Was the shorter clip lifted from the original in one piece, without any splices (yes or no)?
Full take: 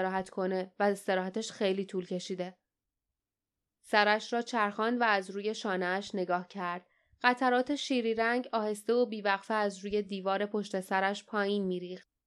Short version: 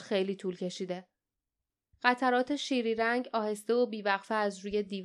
no